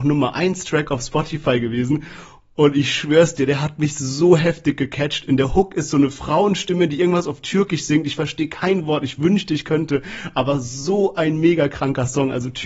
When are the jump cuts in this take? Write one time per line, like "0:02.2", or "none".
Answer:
none